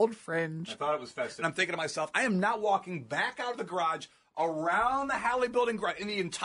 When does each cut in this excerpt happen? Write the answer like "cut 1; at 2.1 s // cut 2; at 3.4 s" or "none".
cut 1; at 1.4 s